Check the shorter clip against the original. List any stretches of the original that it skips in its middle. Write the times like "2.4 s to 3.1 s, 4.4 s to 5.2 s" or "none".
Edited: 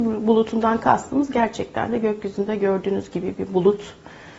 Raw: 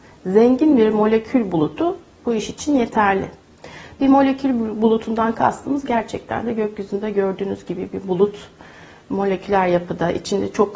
none